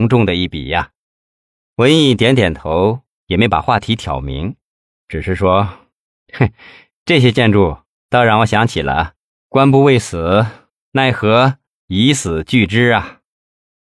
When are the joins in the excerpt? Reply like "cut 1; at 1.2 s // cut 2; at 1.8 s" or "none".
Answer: none